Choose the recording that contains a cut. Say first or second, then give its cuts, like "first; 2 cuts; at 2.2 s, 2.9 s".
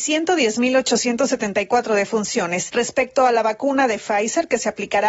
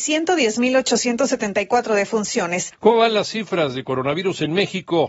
second; 1 cut; at 2.7 s